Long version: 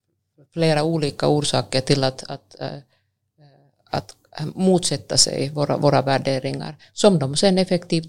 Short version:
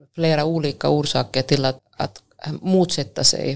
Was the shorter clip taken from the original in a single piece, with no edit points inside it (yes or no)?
no